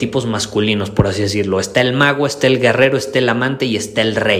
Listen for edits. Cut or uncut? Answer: uncut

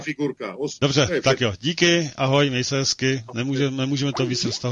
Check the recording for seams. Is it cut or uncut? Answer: uncut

